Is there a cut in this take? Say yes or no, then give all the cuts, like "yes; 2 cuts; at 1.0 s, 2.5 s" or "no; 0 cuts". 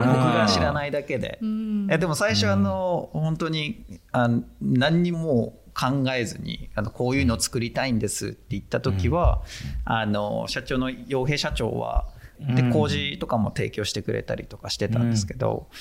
yes; 2 cuts; at 5.1 s, 12.3 s